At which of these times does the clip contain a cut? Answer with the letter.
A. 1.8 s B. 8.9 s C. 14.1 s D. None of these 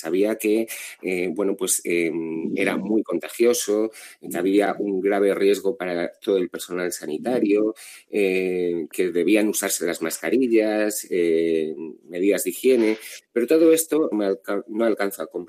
C